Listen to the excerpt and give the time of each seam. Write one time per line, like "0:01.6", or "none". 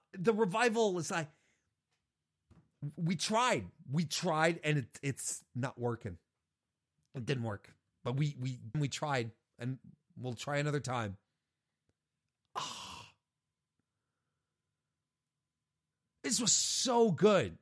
0:08.7